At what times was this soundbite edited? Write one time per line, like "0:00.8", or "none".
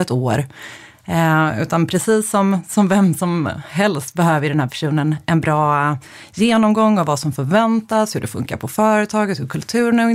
none